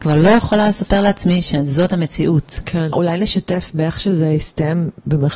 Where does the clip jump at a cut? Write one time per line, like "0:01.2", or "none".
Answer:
0:02.9